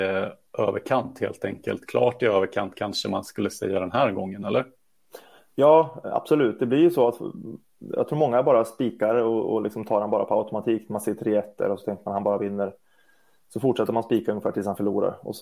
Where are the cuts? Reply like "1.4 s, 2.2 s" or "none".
none